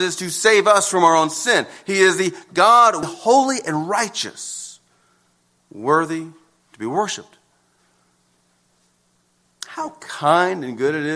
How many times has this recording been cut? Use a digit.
1